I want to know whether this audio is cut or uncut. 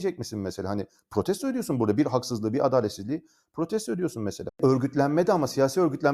cut